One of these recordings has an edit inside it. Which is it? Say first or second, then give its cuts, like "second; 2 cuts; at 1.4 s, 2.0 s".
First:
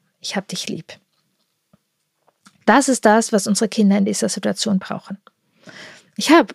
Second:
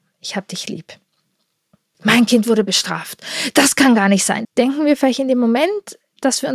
second; 2 cuts; at 1.9 s, 4.4 s